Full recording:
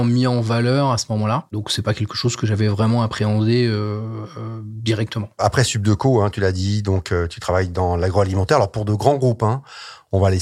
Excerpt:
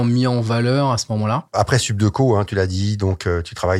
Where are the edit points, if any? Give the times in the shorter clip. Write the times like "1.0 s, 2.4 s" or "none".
1.5 s